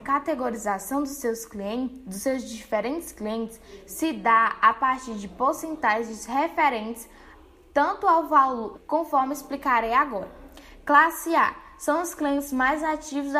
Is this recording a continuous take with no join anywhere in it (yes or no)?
no